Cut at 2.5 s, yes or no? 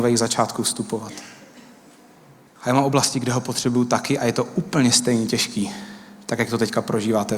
yes